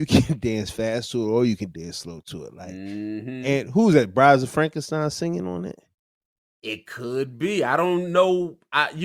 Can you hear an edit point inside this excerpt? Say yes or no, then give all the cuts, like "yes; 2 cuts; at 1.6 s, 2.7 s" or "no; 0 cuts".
no; 0 cuts